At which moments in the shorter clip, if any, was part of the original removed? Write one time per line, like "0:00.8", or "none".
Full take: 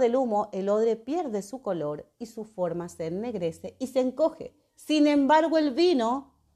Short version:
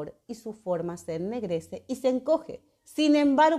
none